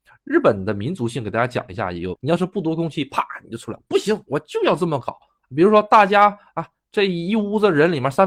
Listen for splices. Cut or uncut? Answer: cut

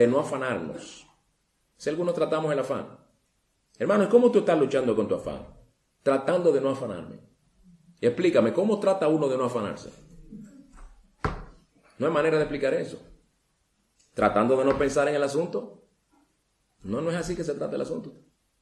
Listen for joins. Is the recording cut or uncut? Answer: uncut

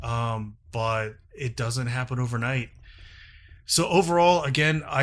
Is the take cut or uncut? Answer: uncut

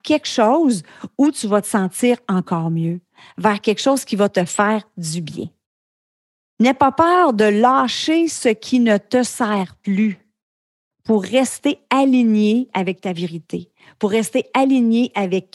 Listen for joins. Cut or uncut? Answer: uncut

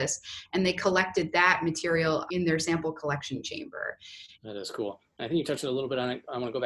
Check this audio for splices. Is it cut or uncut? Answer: cut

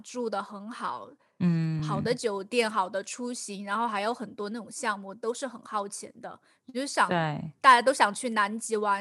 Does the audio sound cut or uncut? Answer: uncut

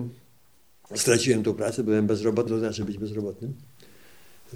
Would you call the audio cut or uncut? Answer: cut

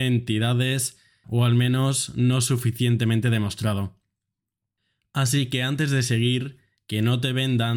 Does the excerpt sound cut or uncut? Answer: cut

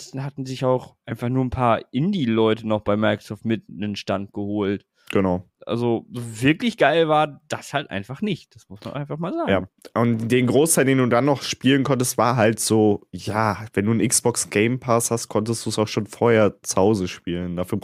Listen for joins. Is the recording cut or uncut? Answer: uncut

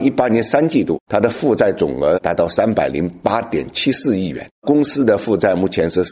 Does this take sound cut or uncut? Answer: uncut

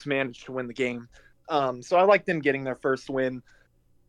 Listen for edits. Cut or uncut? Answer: uncut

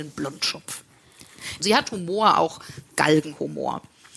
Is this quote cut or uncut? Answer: cut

